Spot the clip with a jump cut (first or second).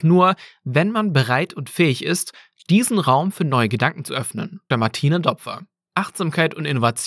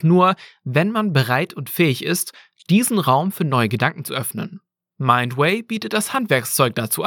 first